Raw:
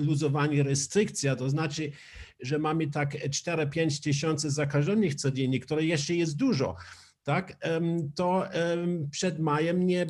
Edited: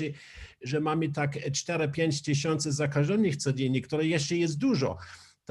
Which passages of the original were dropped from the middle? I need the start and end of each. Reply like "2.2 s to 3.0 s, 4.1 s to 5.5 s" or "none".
none